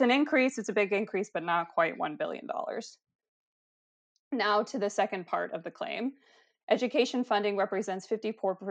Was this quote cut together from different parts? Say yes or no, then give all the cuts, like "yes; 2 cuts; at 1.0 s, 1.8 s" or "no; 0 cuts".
no; 0 cuts